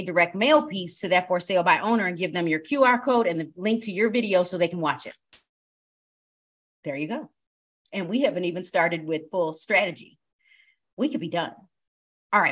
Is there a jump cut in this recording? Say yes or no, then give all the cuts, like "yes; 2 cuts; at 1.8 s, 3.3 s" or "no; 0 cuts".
no; 0 cuts